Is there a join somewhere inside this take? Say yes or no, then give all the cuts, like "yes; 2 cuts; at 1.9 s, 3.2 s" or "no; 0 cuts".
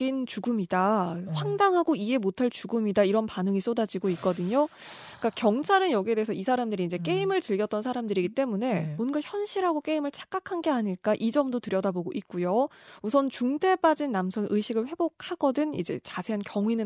no; 0 cuts